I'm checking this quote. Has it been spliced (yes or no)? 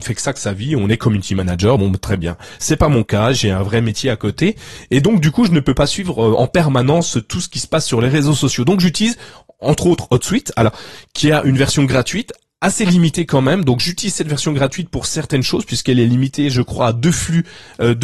no